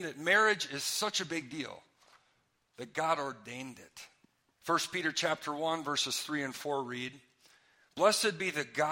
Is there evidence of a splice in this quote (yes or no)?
yes